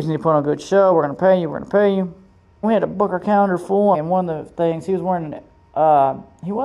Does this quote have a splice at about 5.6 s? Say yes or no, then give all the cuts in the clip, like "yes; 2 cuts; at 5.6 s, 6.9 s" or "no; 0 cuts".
no; 2 cuts; at 2.6 s, 3.9 s